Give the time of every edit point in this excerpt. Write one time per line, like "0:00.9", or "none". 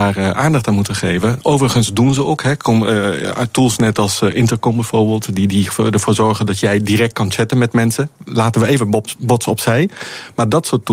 none